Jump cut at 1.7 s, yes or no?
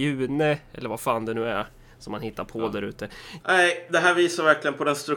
no